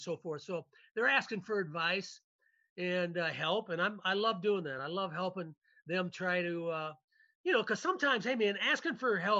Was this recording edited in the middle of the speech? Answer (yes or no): no